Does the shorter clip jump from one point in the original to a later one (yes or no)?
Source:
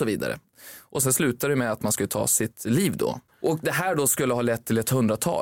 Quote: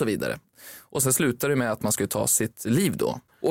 no